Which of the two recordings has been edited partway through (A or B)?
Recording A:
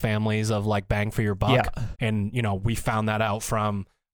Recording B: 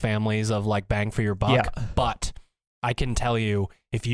A